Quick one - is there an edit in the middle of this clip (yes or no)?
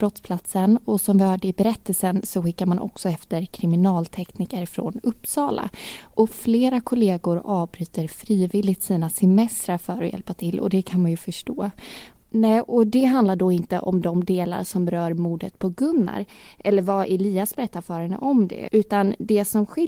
yes